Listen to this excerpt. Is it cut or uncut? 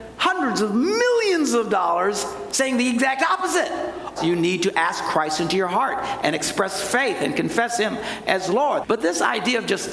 cut